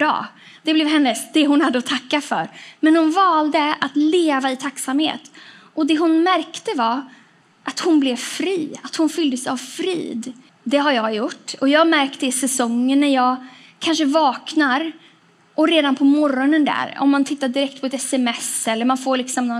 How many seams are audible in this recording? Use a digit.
2